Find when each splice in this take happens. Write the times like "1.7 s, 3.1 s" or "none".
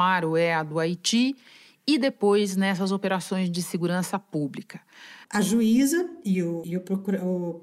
5.2 s, 6.6 s